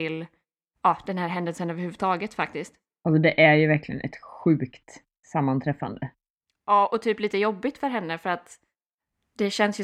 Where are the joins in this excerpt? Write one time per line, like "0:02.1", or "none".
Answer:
none

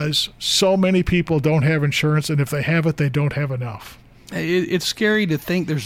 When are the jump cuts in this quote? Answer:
none

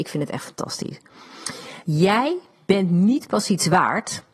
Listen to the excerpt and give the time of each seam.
0:01.8

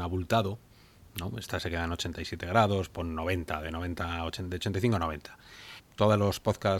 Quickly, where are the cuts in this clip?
0:05.8

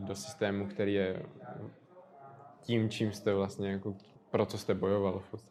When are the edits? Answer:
0:04.2

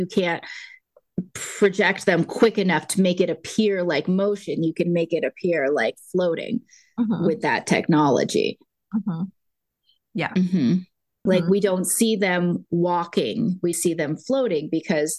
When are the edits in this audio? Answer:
0:11.3
0:13.7

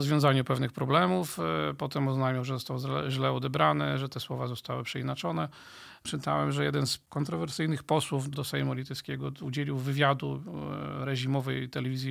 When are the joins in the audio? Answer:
0:08.3

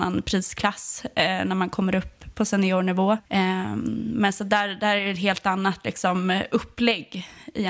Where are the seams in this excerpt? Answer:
0:03.3

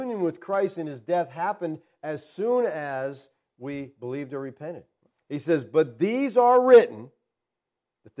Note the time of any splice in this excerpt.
0:05.1

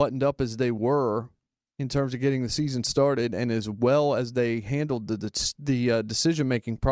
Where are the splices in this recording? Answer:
none

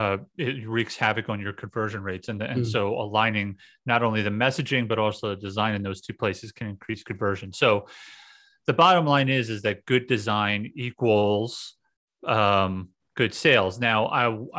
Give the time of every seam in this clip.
none

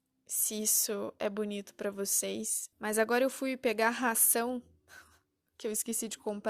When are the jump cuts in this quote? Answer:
0:02.7

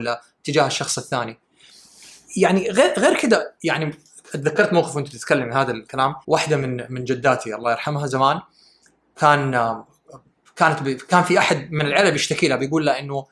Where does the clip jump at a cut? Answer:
0:06.2

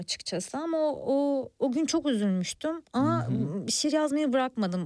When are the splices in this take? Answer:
none

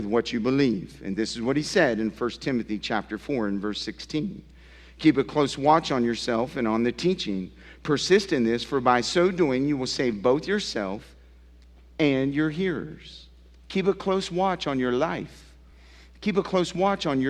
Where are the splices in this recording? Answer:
none

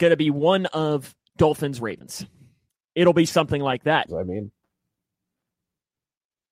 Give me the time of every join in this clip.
0:04.1

